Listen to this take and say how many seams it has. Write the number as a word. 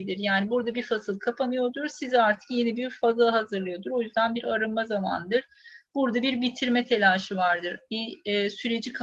zero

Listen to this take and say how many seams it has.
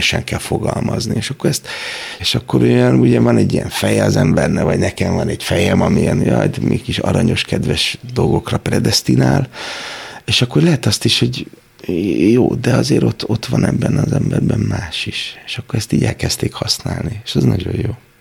one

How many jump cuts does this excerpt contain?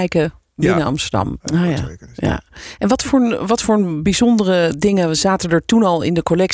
one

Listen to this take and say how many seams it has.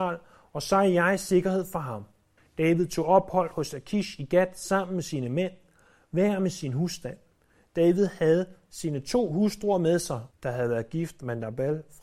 two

